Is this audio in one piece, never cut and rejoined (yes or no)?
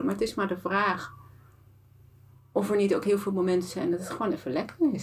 yes